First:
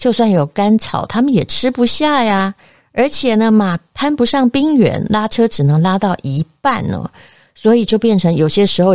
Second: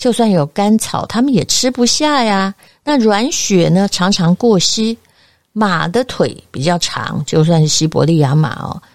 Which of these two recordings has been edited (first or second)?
second